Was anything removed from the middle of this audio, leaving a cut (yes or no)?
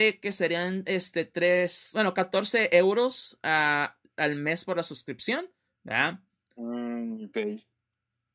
yes